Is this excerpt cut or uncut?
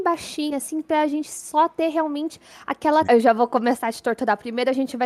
cut